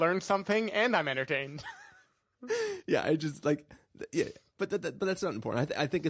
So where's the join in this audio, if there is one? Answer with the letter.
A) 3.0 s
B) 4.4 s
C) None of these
C